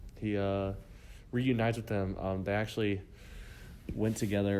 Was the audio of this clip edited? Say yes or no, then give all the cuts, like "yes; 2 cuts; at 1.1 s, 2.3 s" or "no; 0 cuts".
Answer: no; 0 cuts